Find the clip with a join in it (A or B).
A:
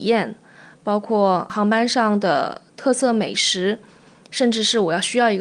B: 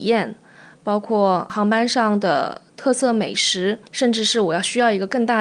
B